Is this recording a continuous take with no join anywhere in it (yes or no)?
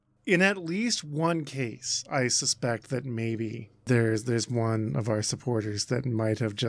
yes